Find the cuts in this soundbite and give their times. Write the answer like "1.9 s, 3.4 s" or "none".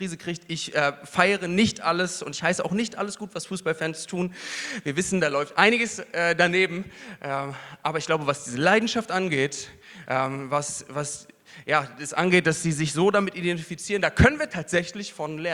none